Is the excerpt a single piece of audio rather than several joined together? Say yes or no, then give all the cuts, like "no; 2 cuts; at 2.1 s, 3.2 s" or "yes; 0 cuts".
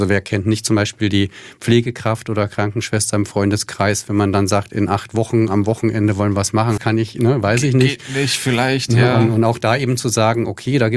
no; 1 cut; at 6.8 s